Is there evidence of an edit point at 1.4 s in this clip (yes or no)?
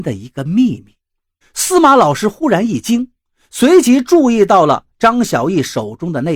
yes